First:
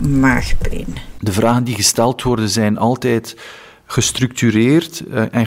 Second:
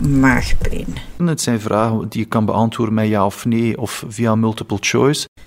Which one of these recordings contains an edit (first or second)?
second